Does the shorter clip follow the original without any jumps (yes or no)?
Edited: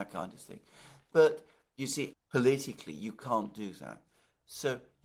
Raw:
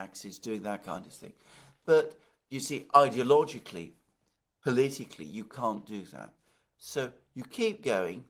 no